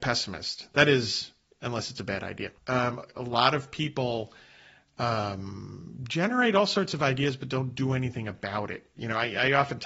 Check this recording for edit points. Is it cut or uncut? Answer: cut